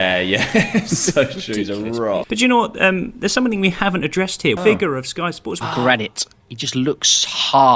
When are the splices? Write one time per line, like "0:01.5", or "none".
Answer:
0:02.2
0:04.6
0:05.6